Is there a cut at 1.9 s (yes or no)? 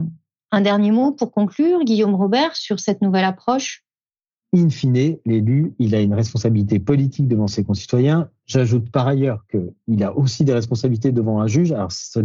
no